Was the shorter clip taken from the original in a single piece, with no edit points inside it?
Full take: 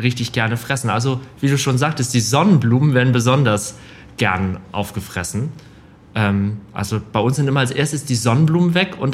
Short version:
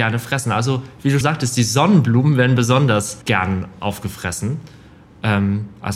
no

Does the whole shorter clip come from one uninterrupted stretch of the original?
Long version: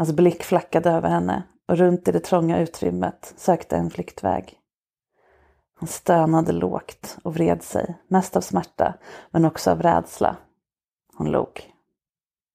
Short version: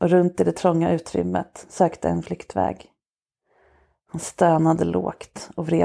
yes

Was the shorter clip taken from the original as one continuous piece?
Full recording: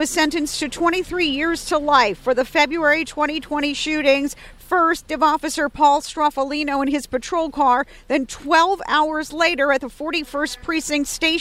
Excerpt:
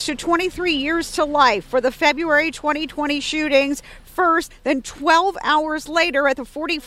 no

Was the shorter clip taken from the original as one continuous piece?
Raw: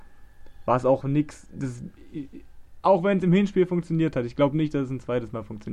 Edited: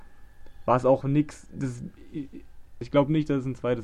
no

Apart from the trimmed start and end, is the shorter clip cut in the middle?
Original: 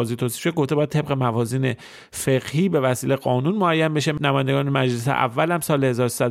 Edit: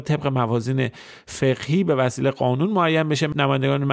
no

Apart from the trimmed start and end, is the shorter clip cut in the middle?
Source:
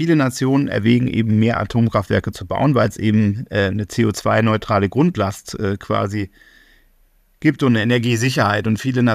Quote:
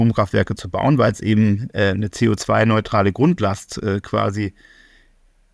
no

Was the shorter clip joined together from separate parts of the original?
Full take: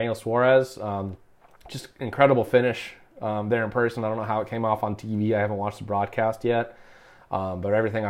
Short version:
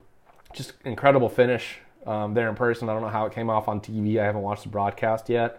no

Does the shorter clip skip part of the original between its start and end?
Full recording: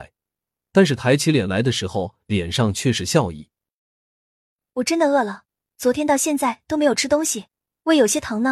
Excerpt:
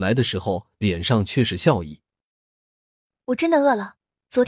no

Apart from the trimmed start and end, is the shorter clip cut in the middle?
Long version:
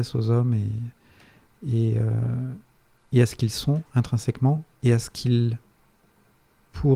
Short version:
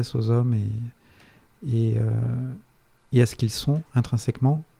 no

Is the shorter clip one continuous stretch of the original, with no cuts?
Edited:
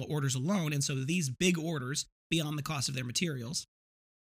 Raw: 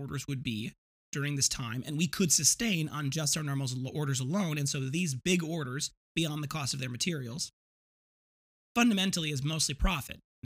yes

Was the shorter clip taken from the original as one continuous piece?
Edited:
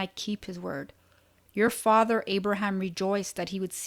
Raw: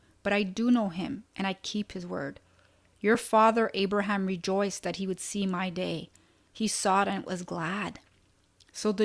yes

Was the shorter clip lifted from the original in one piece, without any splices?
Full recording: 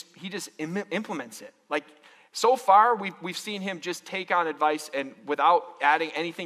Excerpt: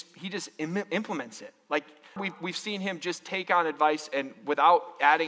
no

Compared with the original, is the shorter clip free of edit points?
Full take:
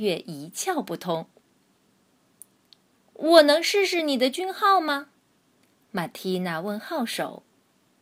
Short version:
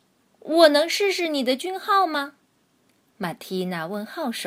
yes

